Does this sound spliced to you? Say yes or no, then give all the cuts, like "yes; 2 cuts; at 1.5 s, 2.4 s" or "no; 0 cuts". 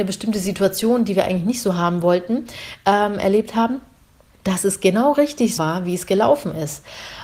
yes; 2 cuts; at 4.3 s, 5.6 s